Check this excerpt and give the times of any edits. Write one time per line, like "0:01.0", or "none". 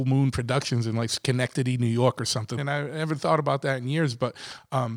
0:02.6